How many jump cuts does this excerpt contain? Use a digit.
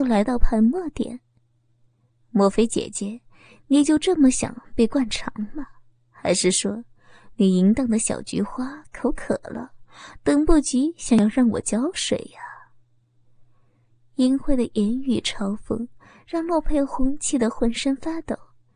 0